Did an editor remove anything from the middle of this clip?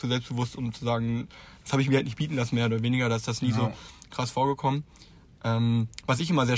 no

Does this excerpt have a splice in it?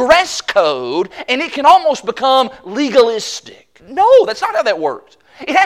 yes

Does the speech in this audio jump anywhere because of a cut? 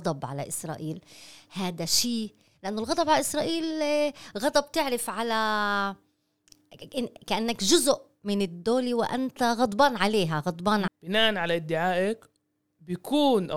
yes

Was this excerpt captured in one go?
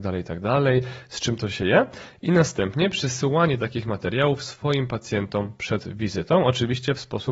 yes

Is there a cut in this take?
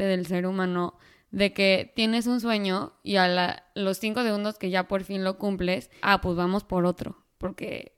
yes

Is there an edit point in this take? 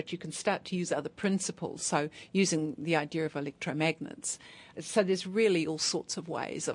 no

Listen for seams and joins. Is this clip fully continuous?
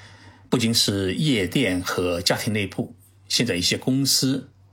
yes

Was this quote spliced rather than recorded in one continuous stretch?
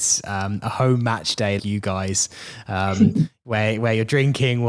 yes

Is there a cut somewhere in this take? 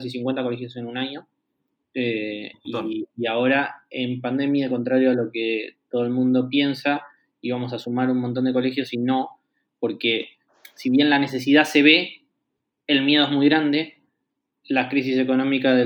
no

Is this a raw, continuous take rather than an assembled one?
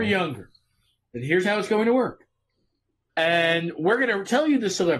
no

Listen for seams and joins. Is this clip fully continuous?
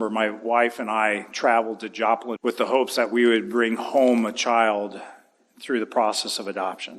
no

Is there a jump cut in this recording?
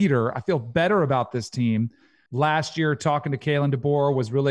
yes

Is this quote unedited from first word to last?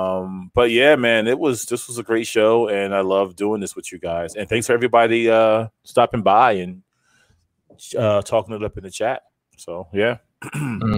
yes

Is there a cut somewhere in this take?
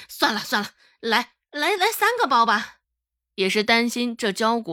yes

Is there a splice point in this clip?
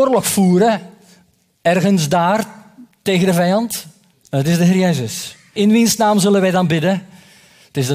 yes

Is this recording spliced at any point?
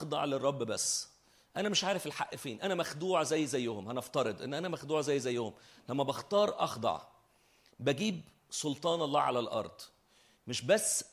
no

